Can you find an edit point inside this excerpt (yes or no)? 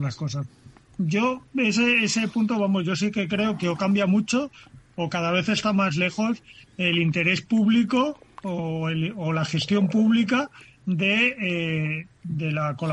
no